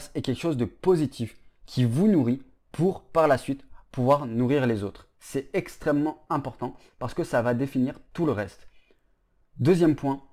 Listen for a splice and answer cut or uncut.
uncut